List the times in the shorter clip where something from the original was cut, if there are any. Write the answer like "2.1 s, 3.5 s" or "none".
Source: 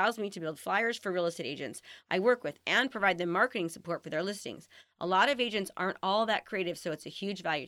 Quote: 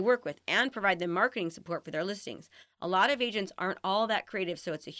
none

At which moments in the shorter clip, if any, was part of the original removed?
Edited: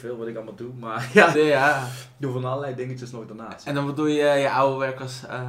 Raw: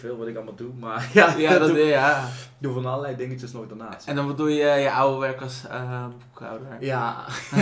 1.3 s

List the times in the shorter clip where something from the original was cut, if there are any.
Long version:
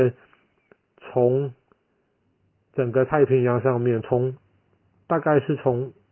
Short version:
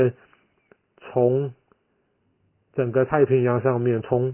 none

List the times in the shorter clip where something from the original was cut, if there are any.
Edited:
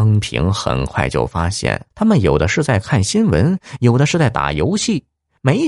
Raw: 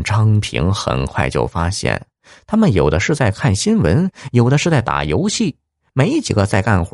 1.9 s

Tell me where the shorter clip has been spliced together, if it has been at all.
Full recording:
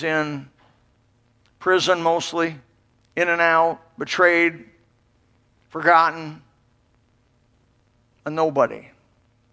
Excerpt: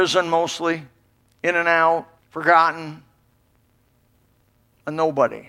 2.2 s

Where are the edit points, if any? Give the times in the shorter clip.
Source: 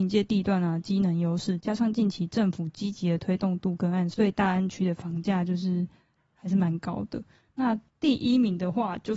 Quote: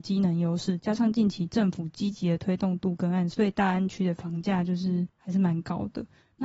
5.1 s

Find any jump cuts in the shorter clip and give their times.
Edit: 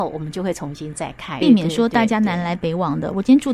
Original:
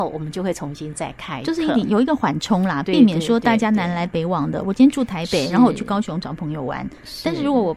1.4 s

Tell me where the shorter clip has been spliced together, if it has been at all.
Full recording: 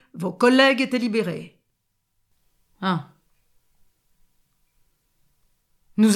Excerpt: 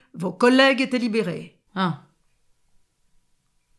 1.7 s

